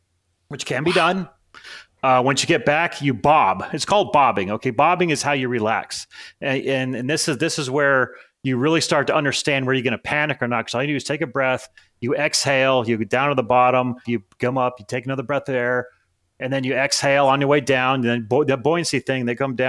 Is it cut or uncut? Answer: cut